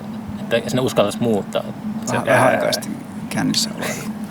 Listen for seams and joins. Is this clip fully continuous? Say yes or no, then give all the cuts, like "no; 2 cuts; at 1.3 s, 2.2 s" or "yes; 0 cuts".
no; 1 cut; at 2.1 s